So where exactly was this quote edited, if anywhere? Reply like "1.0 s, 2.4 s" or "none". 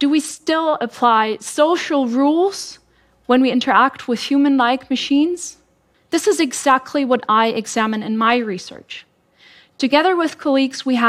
5.9 s